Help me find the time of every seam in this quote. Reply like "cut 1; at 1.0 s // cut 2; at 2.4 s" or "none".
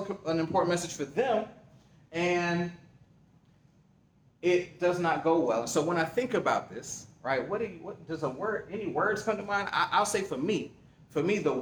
none